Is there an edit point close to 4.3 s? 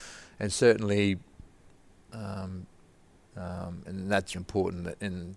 yes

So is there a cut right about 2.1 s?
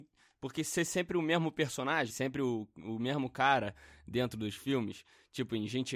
yes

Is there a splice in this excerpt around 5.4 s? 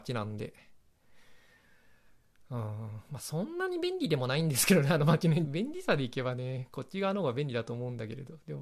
yes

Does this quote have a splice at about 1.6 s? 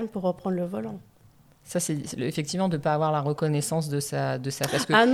no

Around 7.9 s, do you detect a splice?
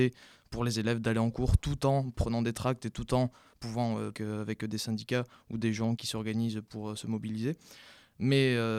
no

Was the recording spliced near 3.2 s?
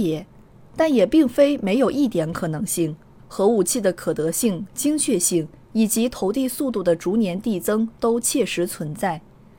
yes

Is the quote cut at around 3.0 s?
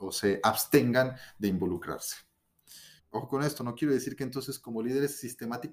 yes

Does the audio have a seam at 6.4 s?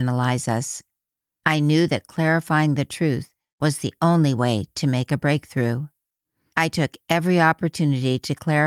no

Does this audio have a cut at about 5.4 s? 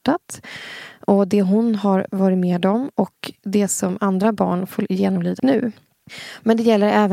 yes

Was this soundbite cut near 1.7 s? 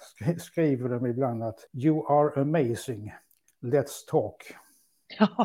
yes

